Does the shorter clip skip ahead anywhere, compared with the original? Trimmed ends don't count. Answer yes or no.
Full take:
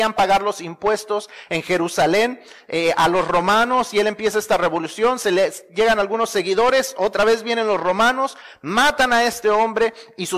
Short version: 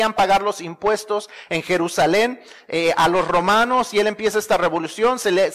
no